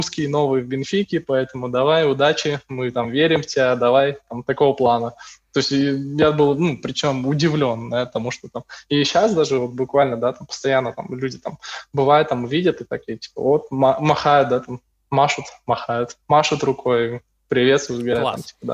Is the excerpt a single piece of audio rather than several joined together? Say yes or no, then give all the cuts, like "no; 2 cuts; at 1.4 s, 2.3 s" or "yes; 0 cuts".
yes; 0 cuts